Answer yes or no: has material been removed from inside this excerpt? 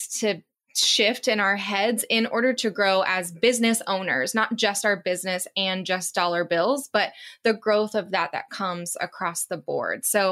no